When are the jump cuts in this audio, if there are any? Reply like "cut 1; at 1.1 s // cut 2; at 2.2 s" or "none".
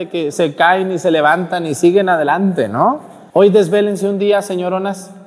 cut 1; at 3.3 s